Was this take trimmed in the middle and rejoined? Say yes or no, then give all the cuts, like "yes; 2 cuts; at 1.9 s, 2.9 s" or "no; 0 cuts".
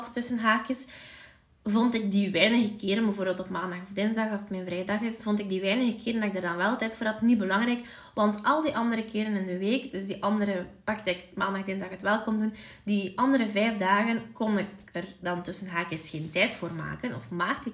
no; 0 cuts